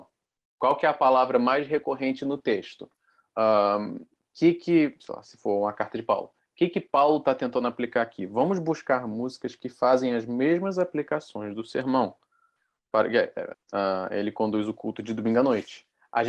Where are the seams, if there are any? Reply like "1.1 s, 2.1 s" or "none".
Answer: 13.5 s

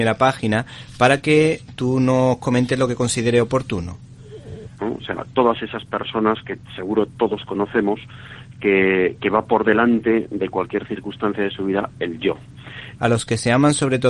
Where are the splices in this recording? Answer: 4.8 s, 13.0 s

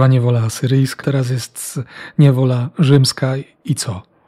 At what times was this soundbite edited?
1.0 s

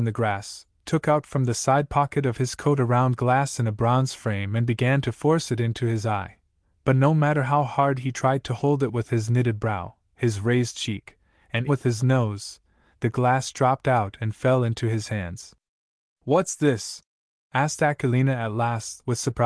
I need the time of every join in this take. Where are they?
11.7 s

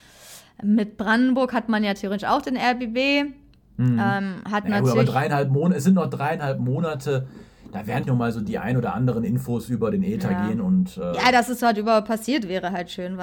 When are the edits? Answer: 8.0 s

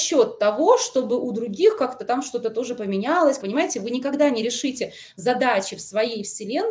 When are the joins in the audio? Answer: 3.4 s

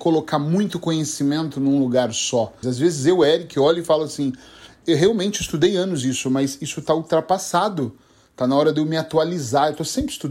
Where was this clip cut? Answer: 2.6 s, 4.8 s

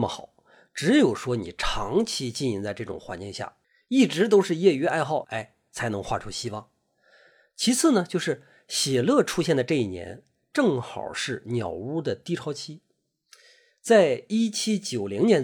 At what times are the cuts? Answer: 5.2 s

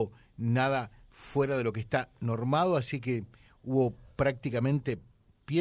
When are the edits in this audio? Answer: none

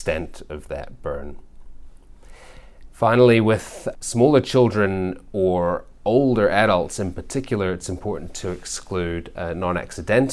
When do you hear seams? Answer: 2.9 s, 3.9 s

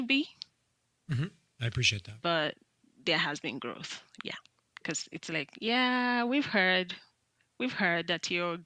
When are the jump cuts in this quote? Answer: 4.6 s

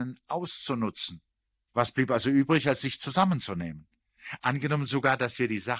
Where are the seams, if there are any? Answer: 1.7 s, 4.4 s

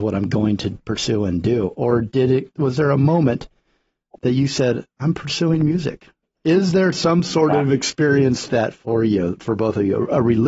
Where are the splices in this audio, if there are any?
6.2 s, 8.5 s

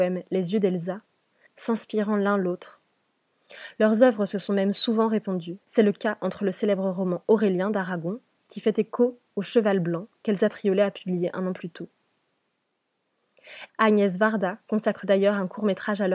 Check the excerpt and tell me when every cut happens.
1.5 s, 5.6 s, 13.7 s

